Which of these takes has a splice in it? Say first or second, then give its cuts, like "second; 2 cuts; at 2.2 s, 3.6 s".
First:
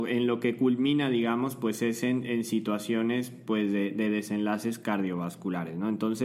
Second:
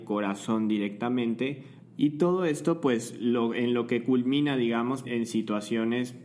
second; 2 cuts; at 1.8 s, 5.0 s